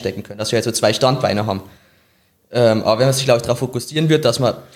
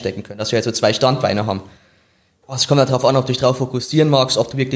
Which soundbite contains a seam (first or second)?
second